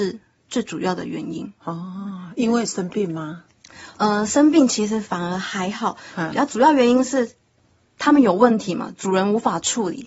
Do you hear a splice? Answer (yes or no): no